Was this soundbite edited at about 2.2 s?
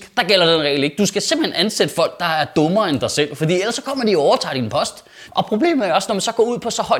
no; 1 cut; at 5.3 s

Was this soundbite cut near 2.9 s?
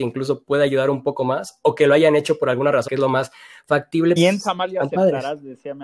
yes; 2 cuts; at 2.9 s, 4.2 s

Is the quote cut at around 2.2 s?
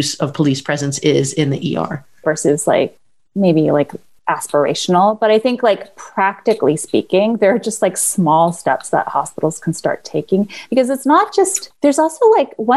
yes; 1 cut; at 2.2 s

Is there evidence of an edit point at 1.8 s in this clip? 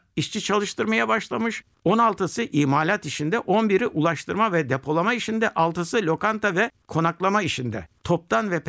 yes; 1 cut; at 1.8 s

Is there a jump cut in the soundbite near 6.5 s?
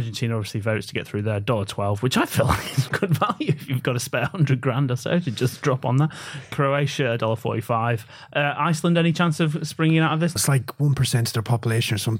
no; 2 cuts; at 2.9 s, 10.4 s

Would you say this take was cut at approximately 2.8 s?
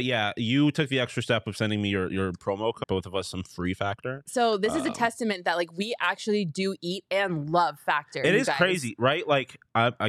yes; 1 cut; at 2.8 s

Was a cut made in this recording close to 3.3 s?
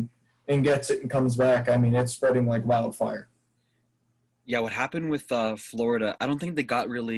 no; 0 cuts

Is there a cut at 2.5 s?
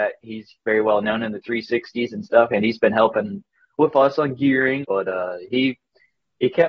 no; 1 cut; at 4.8 s

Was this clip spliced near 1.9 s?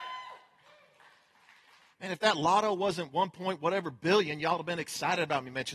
yes; 1 cut; at 1.9 s

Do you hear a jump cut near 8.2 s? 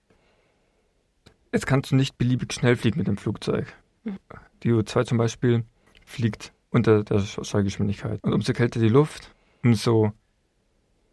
yes; 1 cut; at 8.2 s

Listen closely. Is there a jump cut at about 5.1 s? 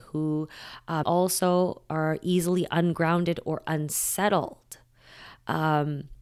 no; 1 cut; at 1.0 s

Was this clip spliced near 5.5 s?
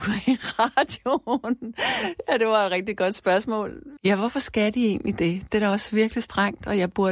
no; 1 cut; at 4.0 s

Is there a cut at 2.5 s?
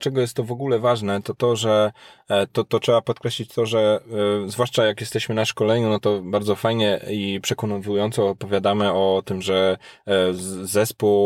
yes; 1 cut; at 2.5 s

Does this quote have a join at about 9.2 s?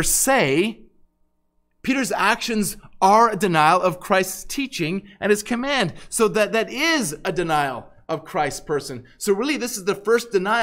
no; 0 cuts

